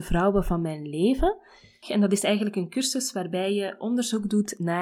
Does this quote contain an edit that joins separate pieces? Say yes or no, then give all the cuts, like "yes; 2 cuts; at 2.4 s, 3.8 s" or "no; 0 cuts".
yes; 1 cut; at 1.8 s